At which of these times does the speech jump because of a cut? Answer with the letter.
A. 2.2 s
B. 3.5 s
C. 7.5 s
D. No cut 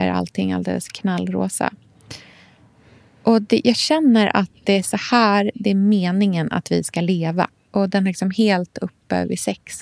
C